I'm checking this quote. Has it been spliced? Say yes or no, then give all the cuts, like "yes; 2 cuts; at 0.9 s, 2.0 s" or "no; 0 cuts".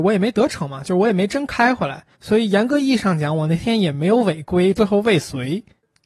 yes; 2 cuts; at 2.1 s, 4.8 s